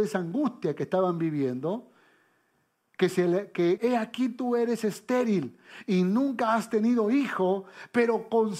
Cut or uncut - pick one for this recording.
cut